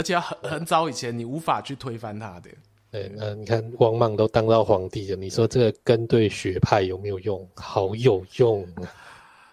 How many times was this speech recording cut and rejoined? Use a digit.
0